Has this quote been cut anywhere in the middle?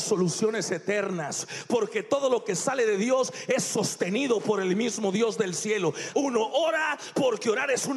yes; 1 cut; at 6.1 s

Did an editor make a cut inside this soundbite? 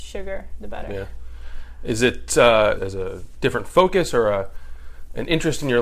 yes; 1 cut; at 2.8 s

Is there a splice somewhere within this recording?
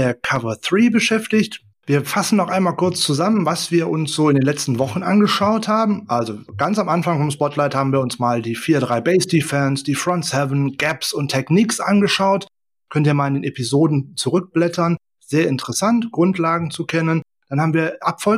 yes; 1 cut; at 1.7 s

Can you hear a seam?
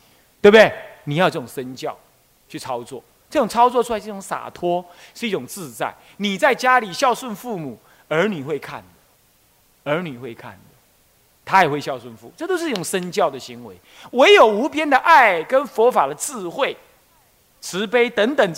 no; 0 cuts

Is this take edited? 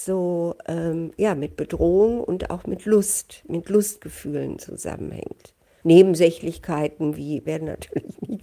yes; 2 cuts; at 5.8 s, 7.5 s

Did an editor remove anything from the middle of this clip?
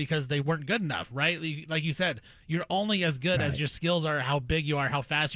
no; 0 cuts

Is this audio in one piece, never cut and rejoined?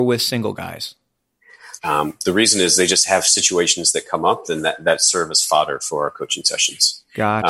no; 1 cut; at 1.8 s

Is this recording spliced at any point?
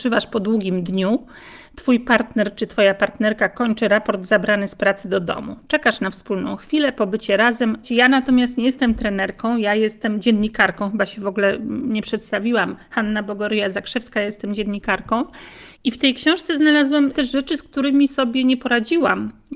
yes; 1 cut; at 7.8 s

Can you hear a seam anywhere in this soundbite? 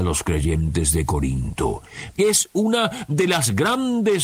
yes; 1 cut; at 2.1 s

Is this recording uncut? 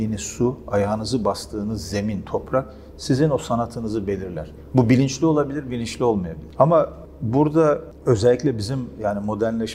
no; 2 cuts; at 4.7 s, 6.6 s

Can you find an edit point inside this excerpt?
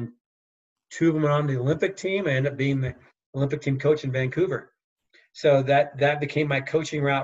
no; 0 cuts

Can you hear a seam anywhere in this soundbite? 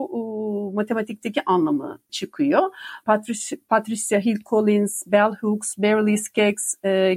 yes; 1 cut; at 3.0 s

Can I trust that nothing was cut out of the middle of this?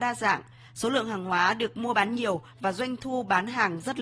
yes; 0 cuts

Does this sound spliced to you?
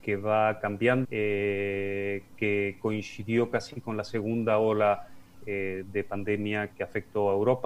yes; 2 cuts; at 1.0 s, 6.7 s

